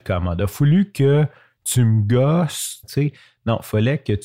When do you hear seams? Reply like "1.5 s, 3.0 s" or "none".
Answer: 2.8 s